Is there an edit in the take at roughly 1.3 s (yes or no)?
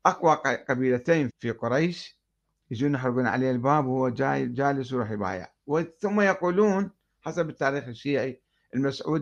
yes